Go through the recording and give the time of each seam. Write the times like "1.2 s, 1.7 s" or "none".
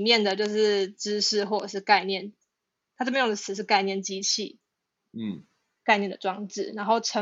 4.9 s